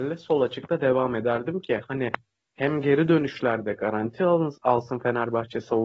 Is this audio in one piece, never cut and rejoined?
yes; 0 cuts

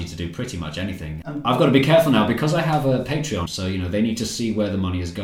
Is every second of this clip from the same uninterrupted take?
no; 2 cuts; at 1.2 s, 3.5 s

